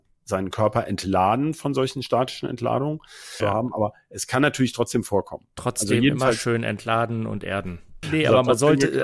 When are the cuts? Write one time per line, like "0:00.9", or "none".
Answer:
0:03.4
0:08.0